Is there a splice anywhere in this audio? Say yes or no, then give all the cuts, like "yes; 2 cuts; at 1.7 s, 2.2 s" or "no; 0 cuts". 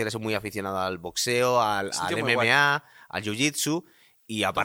no; 0 cuts